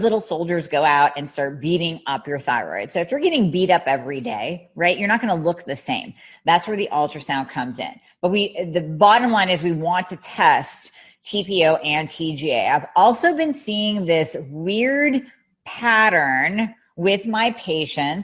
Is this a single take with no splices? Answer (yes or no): yes